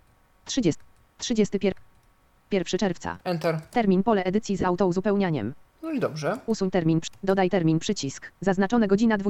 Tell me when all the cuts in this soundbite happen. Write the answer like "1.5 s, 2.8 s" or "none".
3.2 s, 5.6 s, 8.3 s